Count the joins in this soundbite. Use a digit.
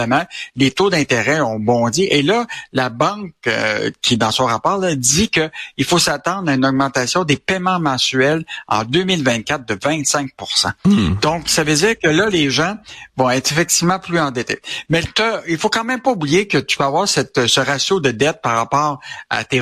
1